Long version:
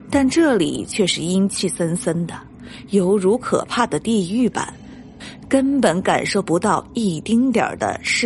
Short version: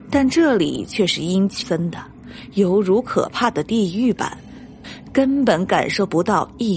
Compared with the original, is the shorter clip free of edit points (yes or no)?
no